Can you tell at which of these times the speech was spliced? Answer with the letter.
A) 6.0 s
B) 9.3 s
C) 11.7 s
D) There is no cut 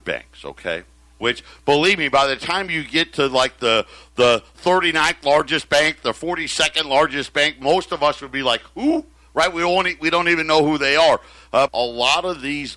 C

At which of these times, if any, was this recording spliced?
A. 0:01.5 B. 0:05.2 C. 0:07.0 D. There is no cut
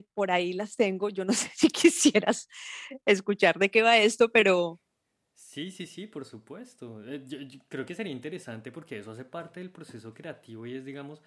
A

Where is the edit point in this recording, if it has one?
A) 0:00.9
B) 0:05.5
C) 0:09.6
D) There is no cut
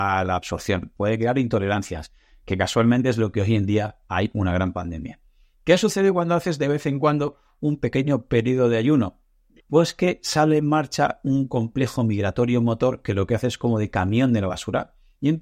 C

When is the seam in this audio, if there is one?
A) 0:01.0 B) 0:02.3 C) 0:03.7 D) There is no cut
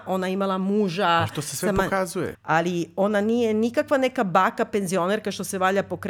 B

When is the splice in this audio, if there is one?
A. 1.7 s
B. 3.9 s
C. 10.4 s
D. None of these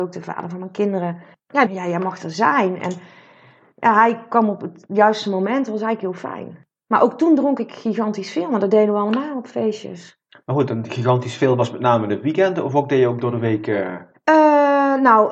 A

